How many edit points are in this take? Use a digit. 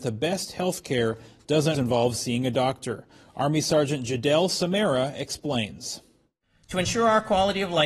1